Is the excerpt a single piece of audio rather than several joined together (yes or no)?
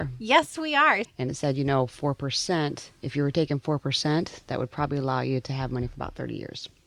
no